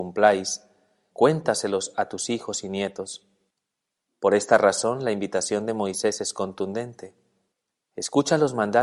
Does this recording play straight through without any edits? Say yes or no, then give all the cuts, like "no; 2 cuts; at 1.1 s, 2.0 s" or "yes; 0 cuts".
no; 2 cuts; at 1.1 s, 4.1 s